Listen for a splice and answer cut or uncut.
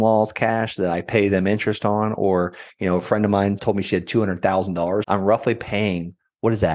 cut